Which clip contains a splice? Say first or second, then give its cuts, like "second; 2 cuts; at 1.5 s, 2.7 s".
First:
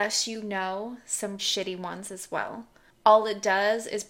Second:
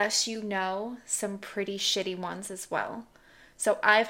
first; 2 cuts; at 1.4 s, 2.9 s